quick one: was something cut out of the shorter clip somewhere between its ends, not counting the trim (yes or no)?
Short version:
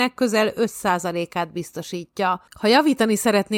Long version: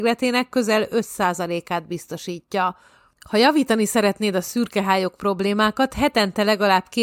yes